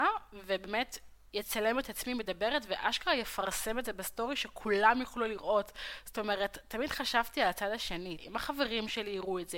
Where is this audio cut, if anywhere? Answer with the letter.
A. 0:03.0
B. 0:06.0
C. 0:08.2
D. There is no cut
C